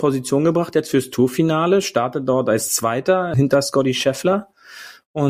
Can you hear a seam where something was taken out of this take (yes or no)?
yes